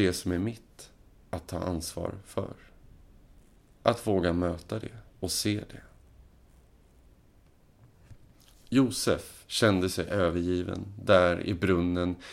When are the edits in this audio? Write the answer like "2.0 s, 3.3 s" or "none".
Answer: 5.1 s